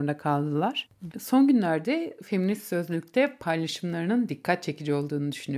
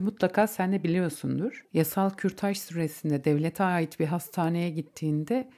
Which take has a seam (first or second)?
first